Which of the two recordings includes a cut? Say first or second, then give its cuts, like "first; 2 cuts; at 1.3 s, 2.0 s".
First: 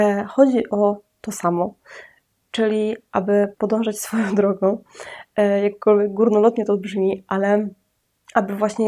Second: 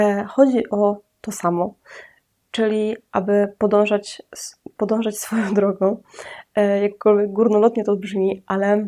first; 1 cut; at 3.5 s